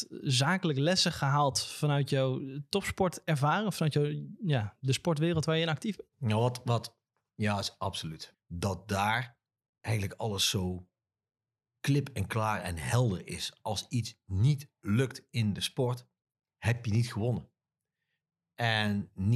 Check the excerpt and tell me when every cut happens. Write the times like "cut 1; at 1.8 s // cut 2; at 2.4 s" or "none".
cut 1; at 8.3 s